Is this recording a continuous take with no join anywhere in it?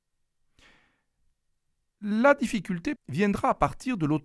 no; 1 cut; at 3.0 s

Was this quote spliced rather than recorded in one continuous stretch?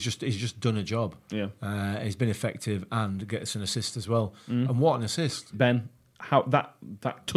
yes; 1 cut; at 5.5 s

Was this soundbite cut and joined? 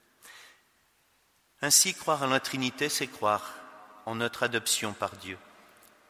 no; 0 cuts

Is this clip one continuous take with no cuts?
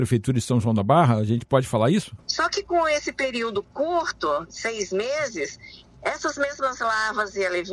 no; 2 cuts; at 2.2 s, 4.4 s

